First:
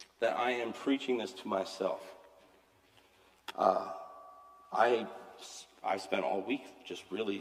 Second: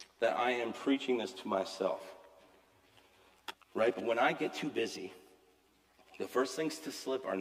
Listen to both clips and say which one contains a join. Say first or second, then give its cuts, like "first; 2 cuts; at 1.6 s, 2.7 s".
second; 1 cut; at 3.5 s